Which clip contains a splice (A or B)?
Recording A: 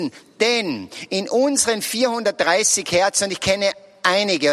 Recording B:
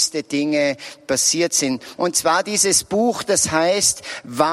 B